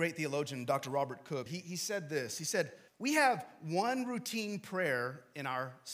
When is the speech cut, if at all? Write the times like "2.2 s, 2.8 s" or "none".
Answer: 1.5 s, 2.9 s

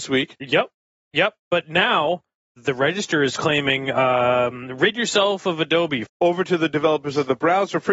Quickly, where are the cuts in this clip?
2.6 s, 6.0 s

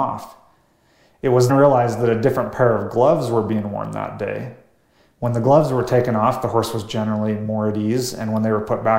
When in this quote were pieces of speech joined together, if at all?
1.5 s

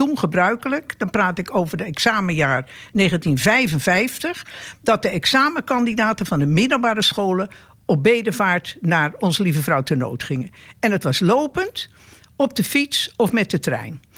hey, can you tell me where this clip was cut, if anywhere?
none

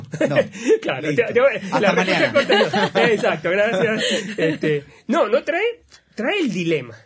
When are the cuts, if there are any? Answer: none

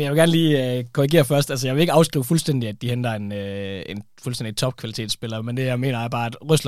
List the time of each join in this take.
none

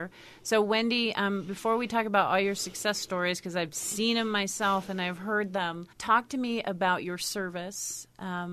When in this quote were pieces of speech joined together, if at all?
5.9 s

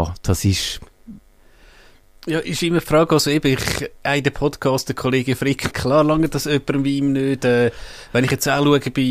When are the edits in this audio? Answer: 5.7 s

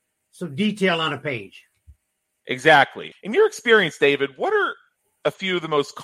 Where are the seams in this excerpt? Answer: 3.1 s

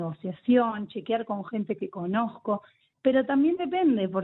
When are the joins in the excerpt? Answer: 2.8 s

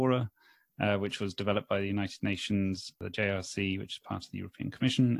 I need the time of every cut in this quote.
none

